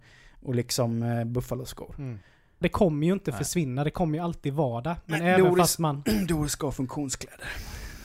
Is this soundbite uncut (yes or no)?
no